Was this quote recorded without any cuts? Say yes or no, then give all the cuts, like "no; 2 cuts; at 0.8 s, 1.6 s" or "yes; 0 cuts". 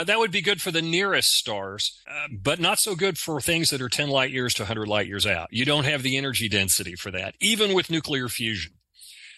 no; 1 cut; at 2.0 s